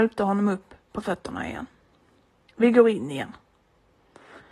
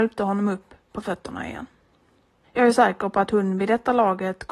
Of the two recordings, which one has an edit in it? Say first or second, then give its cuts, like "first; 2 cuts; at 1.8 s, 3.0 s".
second; 1 cut; at 2.4 s